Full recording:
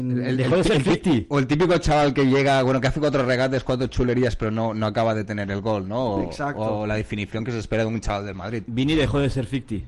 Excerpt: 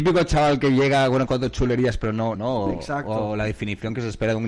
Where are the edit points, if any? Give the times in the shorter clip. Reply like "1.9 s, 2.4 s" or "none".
1.3 s, 2.4 s